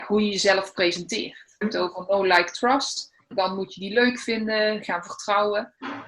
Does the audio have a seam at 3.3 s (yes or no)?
yes